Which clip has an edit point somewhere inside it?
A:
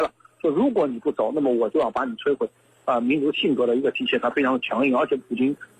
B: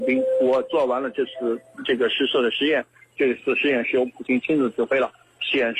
A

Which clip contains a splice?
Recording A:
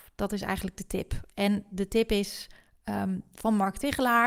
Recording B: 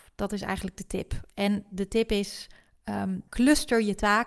B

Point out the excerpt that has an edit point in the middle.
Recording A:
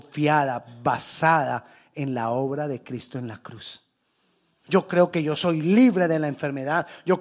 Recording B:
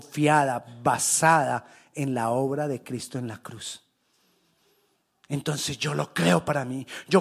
A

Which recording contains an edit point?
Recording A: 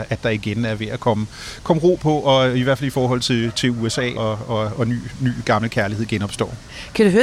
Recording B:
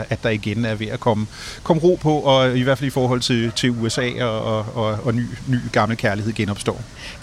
A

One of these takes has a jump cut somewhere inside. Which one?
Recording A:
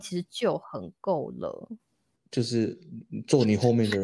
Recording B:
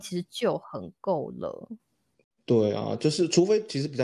A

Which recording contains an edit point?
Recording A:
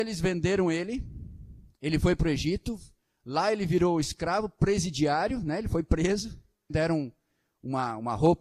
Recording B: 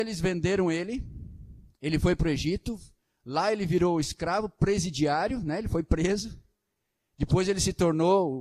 A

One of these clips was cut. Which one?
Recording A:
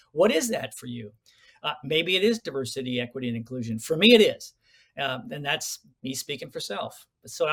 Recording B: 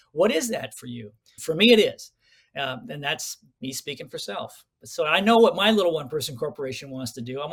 B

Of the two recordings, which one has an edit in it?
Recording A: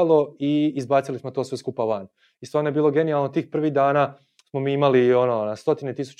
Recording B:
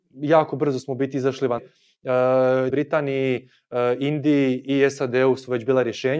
B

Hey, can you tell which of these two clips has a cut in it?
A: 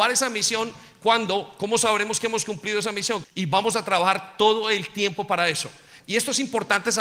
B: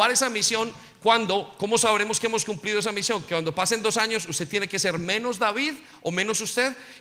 A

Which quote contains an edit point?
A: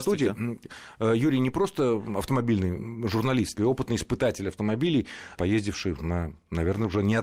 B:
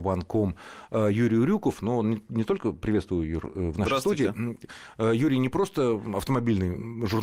A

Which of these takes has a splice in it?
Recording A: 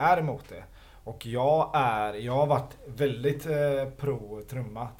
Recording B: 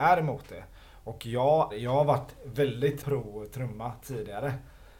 B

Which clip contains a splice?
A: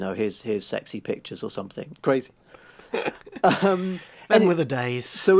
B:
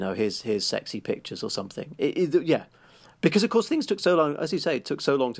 A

